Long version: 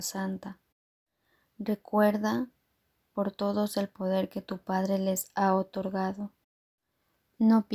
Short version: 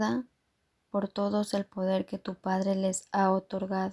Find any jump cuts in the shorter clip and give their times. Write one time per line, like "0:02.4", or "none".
none